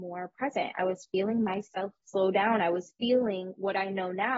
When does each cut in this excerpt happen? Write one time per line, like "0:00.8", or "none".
0:02.0